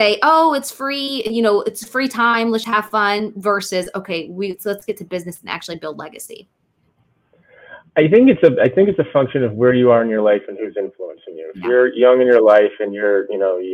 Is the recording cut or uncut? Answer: cut